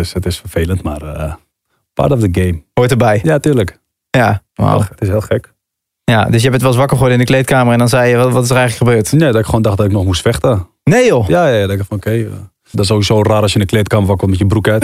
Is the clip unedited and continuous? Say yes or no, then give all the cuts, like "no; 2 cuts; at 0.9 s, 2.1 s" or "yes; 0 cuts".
no; 2 cuts; at 4.5 s, 12.7 s